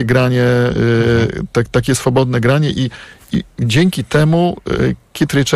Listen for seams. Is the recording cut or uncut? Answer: uncut